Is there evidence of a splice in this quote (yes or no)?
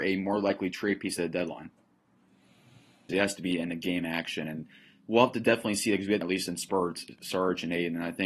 yes